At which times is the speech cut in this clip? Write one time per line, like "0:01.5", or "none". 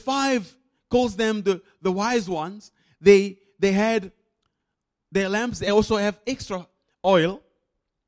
none